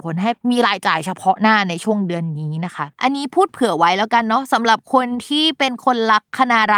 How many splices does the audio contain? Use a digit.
1